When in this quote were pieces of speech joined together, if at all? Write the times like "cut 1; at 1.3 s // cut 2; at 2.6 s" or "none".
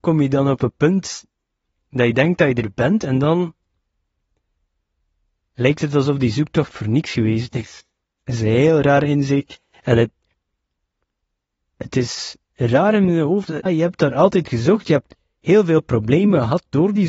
cut 1; at 13.7 s

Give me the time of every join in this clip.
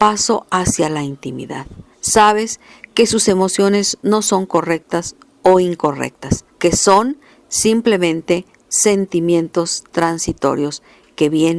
cut 1; at 1.9 s // cut 2; at 6.5 s

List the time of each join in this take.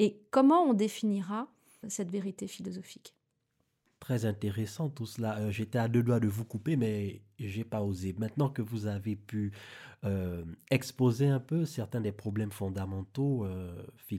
cut 1; at 1.8 s

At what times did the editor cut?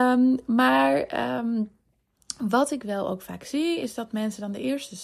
none

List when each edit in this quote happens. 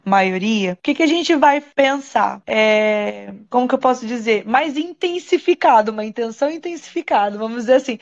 cut 1; at 2.4 s

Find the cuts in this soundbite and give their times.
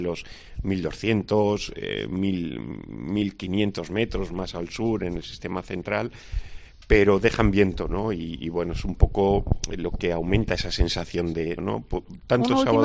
cut 1; at 11.6 s

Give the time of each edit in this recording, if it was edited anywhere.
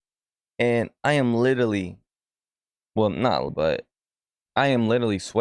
cut 1; at 3.5 s

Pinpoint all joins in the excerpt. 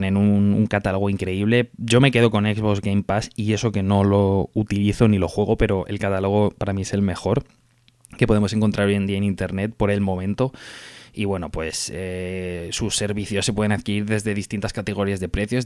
none

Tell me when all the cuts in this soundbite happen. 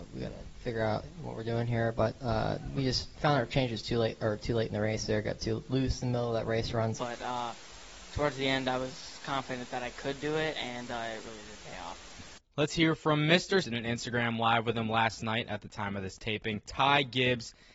cut 1; at 7.0 s // cut 2; at 13.6 s

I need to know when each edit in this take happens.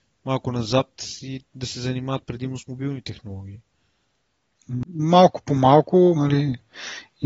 cut 1; at 4.8 s // cut 2; at 6.1 s

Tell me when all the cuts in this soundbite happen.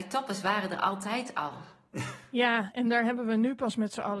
none

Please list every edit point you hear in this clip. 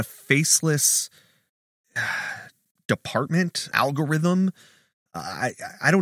cut 1; at 3.7 s

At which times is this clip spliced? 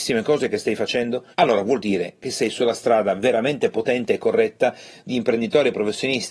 cut 1; at 1.3 s

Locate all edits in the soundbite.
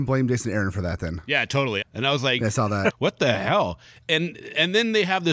cut 1; at 1.8 s // cut 2; at 2.9 s

